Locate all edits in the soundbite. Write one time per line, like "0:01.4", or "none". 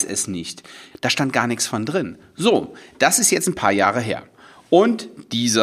0:00.9